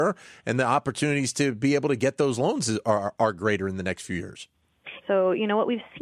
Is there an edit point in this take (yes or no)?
yes